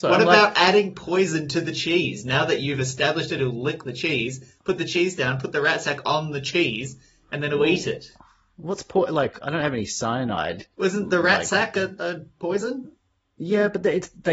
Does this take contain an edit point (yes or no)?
yes